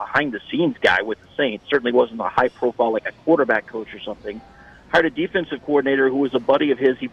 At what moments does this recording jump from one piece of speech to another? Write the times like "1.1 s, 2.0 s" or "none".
none